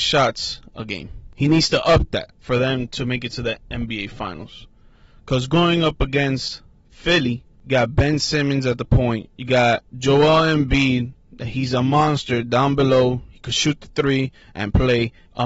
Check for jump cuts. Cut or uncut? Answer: uncut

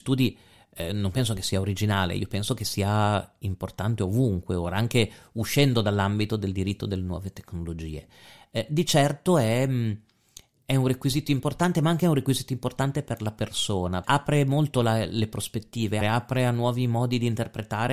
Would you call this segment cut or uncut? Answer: cut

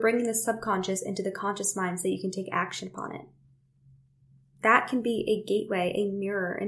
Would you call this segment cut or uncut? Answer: cut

